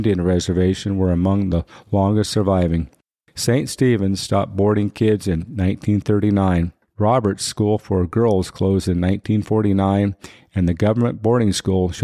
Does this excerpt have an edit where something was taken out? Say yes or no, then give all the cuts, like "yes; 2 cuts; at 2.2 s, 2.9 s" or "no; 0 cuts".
no; 0 cuts